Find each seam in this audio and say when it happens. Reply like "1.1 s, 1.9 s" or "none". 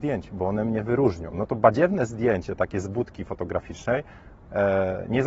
1.3 s